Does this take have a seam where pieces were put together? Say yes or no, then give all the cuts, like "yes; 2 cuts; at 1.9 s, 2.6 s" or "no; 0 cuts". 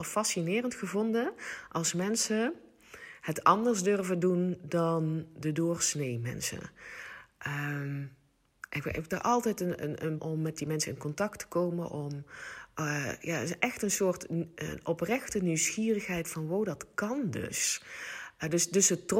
yes; 1 cut; at 10.2 s